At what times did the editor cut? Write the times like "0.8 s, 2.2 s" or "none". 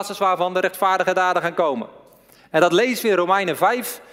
2.4 s